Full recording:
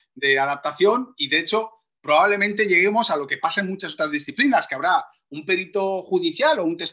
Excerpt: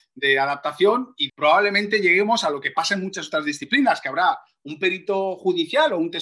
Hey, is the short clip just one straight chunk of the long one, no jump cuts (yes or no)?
no